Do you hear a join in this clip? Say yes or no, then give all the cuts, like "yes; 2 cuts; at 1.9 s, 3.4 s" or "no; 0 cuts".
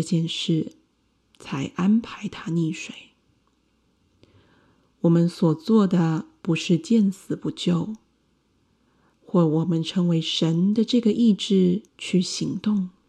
yes; 2 cuts; at 9.1 s, 11.9 s